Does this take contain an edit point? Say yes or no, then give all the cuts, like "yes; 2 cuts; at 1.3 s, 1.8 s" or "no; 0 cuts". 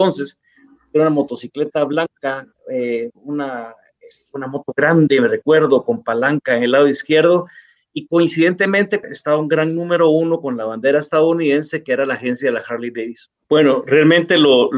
yes; 2 cuts; at 9.0 s, 13.4 s